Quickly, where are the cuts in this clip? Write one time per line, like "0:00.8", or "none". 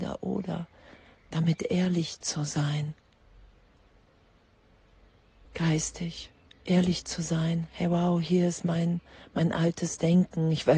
0:05.5